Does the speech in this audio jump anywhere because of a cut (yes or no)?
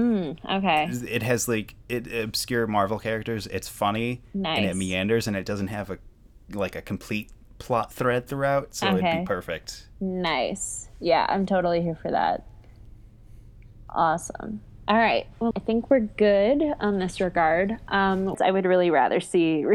yes